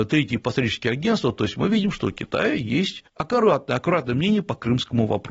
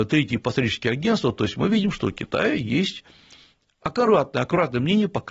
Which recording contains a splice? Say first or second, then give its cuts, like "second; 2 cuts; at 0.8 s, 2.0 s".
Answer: first; 1 cut; at 3.1 s